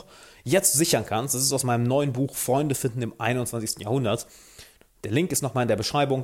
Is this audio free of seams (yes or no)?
yes